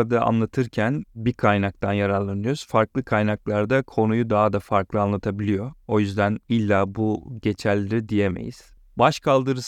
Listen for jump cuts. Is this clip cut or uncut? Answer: uncut